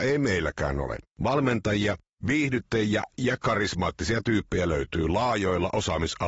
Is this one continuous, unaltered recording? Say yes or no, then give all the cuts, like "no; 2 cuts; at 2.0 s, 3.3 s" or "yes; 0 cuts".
no; 1 cut; at 1.1 s